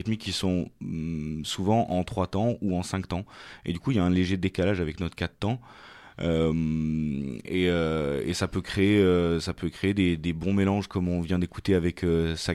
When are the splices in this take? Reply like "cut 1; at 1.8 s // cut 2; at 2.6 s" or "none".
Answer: none

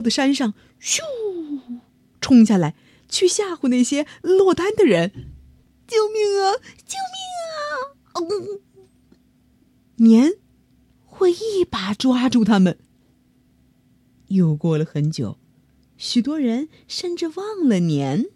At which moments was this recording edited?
cut 1; at 14.2 s

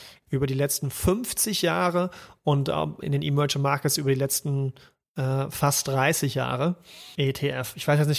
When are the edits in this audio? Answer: cut 1; at 3.0 s // cut 2; at 7.2 s

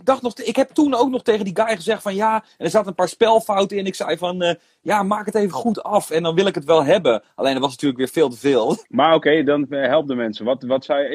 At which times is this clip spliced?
cut 1; at 8.8 s

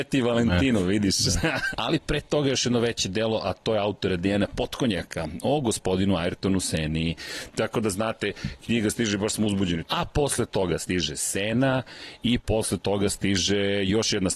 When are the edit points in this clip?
cut 1; at 1.7 s // cut 2; at 7.5 s // cut 3; at 9.8 s

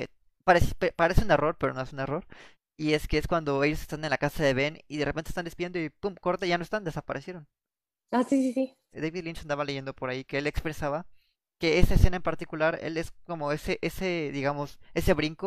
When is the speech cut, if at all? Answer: cut 1; at 8.9 s

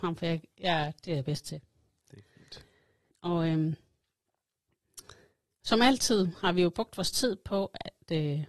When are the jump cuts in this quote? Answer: cut 1; at 3.1 s

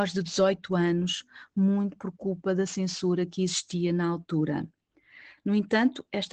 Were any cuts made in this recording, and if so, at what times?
cut 1; at 5.4 s

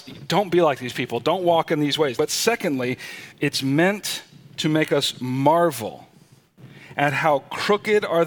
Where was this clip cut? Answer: cut 1; at 2.2 s // cut 2; at 3.3 s

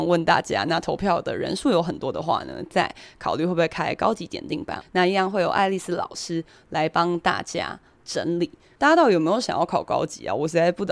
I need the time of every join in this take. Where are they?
cut 1; at 4.8 s // cut 2; at 8.8 s

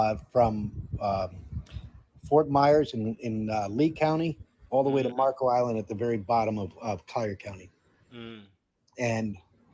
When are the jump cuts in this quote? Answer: none

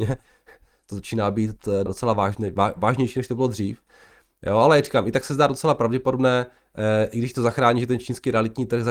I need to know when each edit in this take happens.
cut 1; at 1.9 s

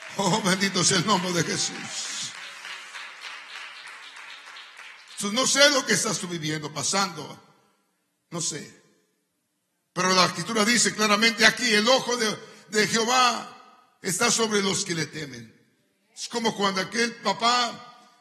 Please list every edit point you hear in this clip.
none

